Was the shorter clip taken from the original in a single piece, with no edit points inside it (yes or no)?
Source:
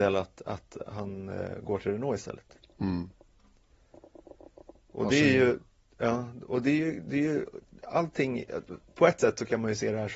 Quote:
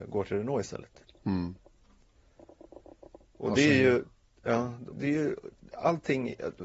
no